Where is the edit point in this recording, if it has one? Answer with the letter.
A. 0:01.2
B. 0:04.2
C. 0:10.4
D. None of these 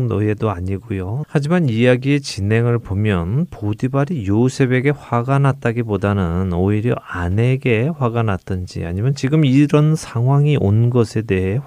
A